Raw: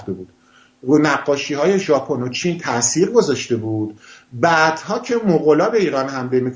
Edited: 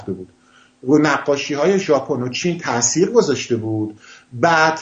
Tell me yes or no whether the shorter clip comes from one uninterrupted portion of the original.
yes